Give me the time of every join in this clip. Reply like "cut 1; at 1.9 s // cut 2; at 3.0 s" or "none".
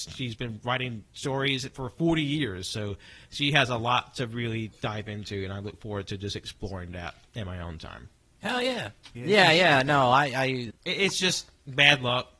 cut 1; at 9.2 s // cut 2; at 10.7 s